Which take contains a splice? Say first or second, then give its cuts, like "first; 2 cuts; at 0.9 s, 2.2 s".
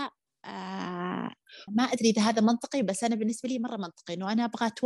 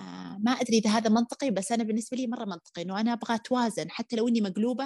first; 1 cut; at 1.7 s